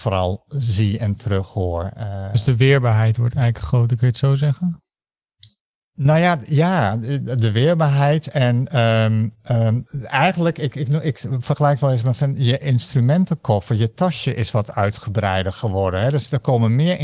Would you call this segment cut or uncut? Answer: uncut